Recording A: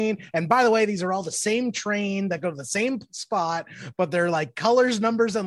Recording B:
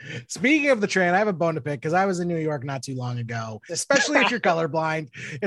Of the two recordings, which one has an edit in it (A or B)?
B